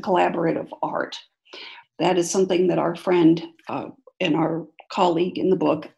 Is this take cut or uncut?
cut